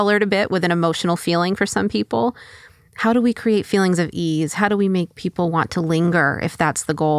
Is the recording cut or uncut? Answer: uncut